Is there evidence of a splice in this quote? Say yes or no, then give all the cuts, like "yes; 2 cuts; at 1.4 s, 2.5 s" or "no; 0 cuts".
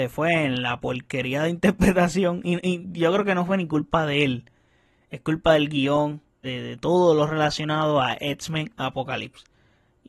yes; 1 cut; at 6.4 s